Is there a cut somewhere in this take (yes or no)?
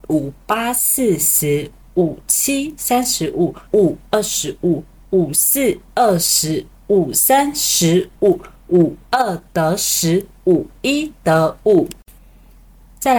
yes